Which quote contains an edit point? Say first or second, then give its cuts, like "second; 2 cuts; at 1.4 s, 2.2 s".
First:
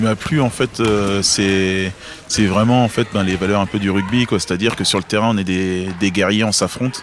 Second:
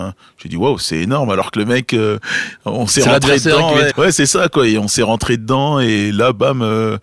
second; 1 cut; at 3.9 s